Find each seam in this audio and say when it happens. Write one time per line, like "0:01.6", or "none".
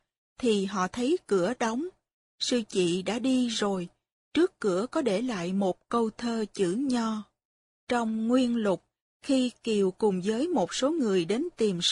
0:07.7